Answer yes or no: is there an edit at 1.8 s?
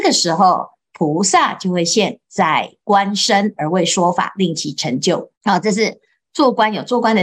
no